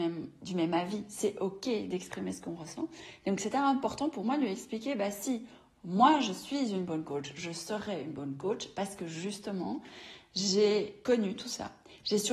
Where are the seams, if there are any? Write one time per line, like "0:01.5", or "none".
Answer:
none